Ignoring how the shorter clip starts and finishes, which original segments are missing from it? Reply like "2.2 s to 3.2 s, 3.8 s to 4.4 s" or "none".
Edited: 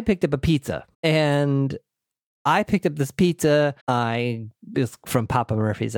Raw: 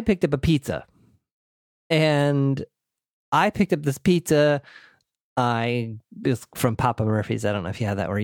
0.9 s to 1.8 s, 4.7 s to 5.3 s